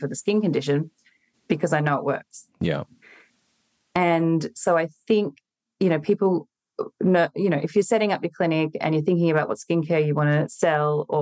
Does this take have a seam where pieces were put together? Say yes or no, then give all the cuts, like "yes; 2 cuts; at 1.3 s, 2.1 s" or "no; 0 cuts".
yes; 1 cut; at 1.3 s